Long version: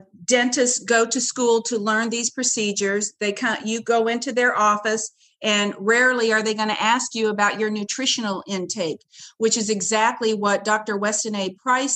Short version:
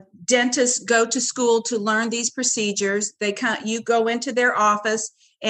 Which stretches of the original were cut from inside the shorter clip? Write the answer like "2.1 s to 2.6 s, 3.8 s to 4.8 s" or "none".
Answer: none

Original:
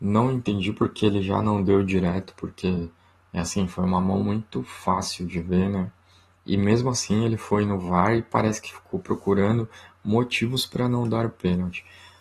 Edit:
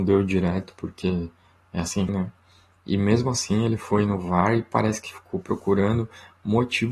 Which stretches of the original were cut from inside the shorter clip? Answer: 3.7 s to 5.7 s

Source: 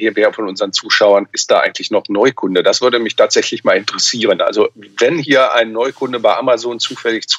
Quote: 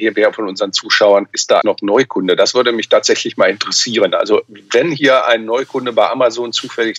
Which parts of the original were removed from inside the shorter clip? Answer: 1.6 s to 1.9 s

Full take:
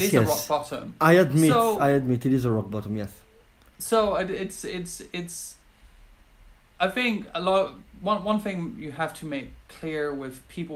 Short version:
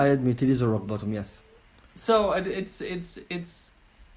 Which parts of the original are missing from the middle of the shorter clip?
none

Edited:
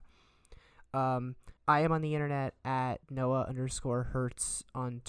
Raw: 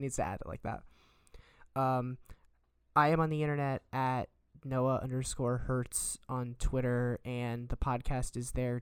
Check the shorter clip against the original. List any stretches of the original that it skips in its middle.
2.4 s to 2.8 s, 4.3 s to 4.6 s

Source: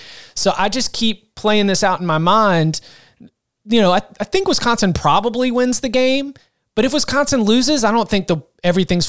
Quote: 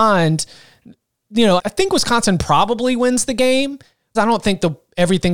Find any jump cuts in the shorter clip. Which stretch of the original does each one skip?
3.9 s to 4.1 s, 6.7 s to 7.8 s

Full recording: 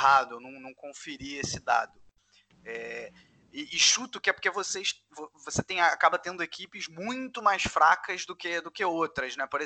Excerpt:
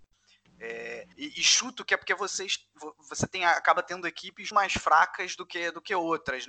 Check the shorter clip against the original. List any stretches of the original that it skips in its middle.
3.2 s to 3.5 s, 6.9 s to 7.4 s

